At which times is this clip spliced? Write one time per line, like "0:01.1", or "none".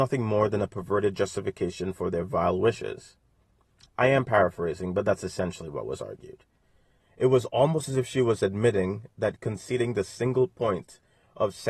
0:07.0